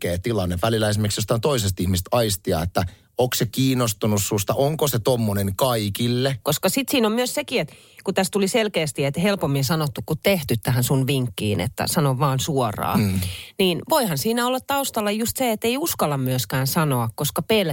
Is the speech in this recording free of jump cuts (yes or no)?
no